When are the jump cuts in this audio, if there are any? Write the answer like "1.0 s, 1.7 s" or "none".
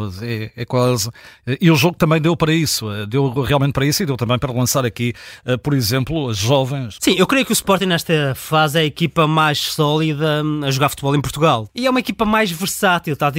7.0 s, 11.7 s